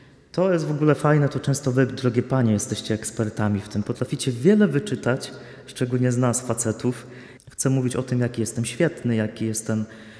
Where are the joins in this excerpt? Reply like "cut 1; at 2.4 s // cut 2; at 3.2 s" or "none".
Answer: cut 1; at 7.4 s

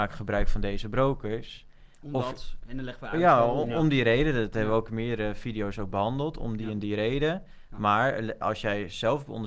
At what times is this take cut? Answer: none

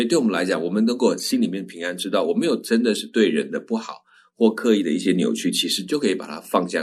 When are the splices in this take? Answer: none

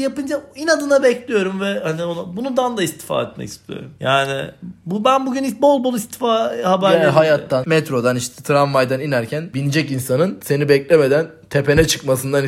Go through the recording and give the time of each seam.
cut 1; at 7.6 s

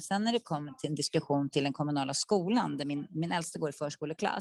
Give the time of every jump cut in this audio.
none

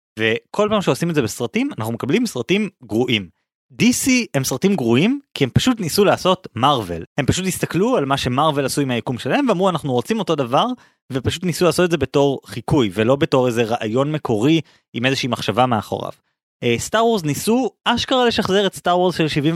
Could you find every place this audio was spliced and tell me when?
none

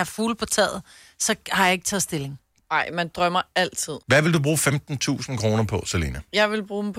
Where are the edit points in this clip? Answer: cut 1; at 4.0 s

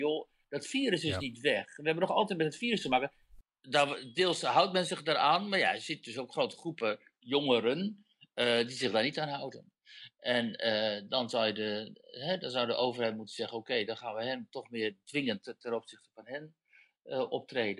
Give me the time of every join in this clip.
cut 1; at 3.4 s

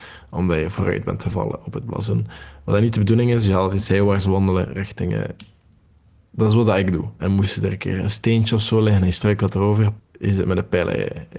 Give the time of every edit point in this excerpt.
cut 1; at 7.2 s // cut 2; at 10.0 s

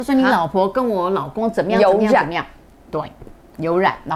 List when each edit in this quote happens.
none

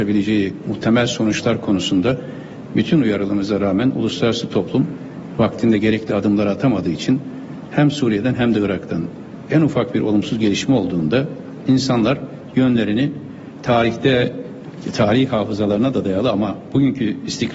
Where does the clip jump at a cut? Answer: none

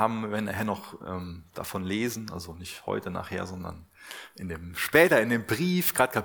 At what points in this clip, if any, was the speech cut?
none

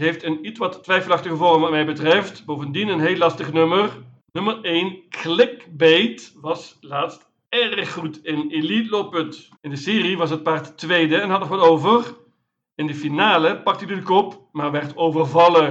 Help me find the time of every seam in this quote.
cut 1; at 4.2 s // cut 2; at 9.6 s

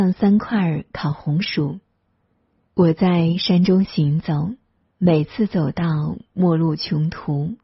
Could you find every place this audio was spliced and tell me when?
cut 1; at 2.7 s // cut 2; at 4.9 s

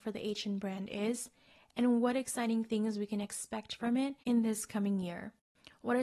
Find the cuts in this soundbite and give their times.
cut 1; at 4.2 s

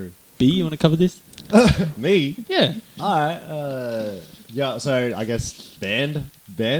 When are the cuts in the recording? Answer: none

